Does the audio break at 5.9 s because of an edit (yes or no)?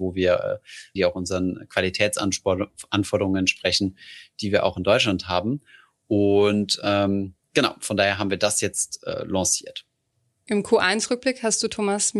no